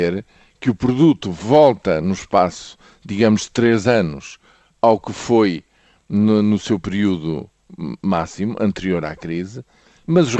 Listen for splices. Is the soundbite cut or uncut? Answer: uncut